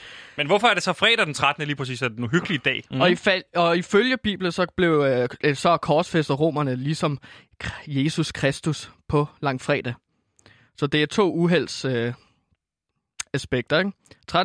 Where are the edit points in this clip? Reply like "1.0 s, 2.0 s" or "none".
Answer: 2.9 s